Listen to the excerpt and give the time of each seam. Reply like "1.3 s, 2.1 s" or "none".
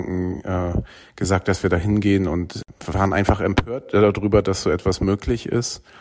none